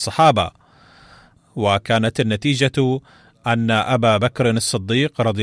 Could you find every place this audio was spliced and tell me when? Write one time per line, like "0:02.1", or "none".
0:01.3